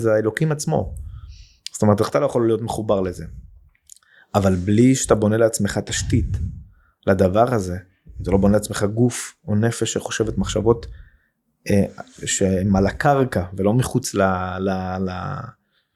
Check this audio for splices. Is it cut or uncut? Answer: uncut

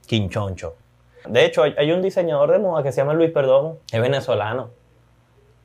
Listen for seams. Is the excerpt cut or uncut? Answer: cut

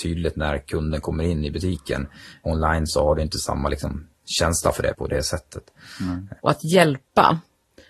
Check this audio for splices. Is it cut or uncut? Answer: cut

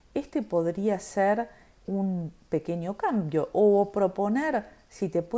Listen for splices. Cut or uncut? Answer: cut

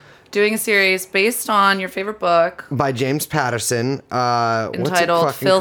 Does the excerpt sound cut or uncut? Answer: uncut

